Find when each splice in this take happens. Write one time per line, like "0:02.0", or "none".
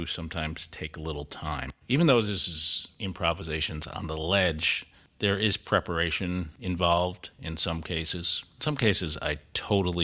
none